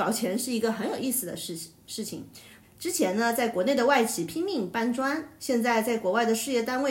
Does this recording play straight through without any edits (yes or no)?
no